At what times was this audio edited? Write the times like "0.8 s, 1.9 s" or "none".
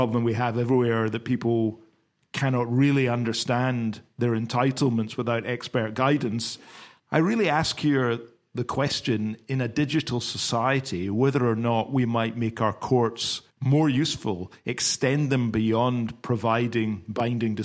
7.0 s, 13.5 s